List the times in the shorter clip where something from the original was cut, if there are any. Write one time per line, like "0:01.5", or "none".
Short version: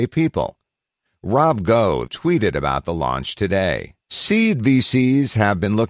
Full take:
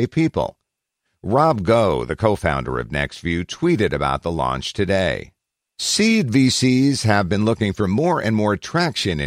0:02.1
0:04.0